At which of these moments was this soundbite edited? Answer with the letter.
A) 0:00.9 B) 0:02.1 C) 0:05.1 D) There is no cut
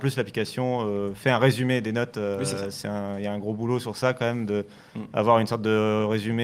D